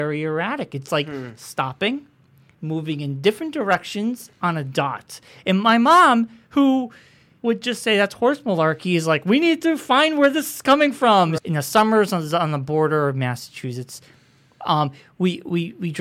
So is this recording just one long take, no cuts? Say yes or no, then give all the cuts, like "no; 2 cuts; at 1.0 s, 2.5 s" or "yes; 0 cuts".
no; 2 cuts; at 2.5 s, 11.4 s